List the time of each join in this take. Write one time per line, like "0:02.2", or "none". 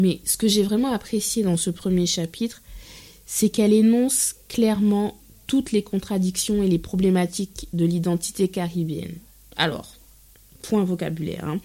none